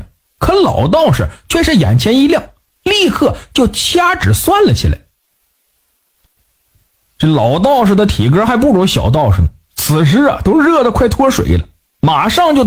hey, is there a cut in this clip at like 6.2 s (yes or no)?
yes